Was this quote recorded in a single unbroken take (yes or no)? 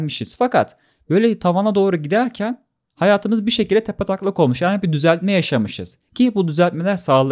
yes